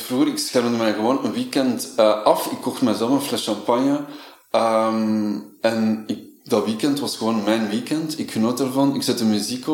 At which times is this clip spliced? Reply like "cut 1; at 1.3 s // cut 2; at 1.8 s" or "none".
none